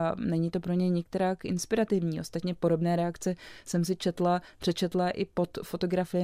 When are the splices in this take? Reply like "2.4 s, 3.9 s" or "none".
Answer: none